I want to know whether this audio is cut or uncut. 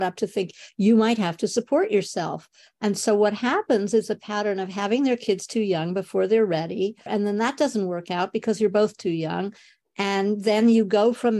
cut